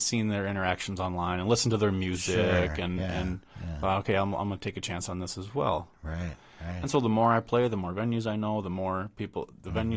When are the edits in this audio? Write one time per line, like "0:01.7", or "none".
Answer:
none